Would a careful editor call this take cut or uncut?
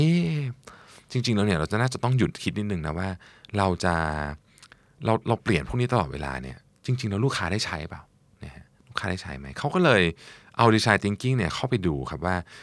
uncut